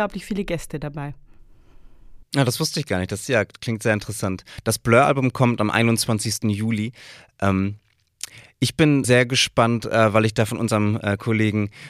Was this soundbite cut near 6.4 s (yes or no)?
no